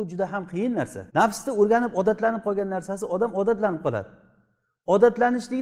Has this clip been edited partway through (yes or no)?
yes